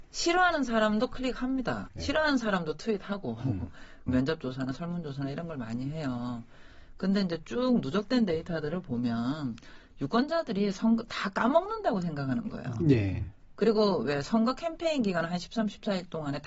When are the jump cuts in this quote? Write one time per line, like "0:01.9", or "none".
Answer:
0:01.9
0:04.1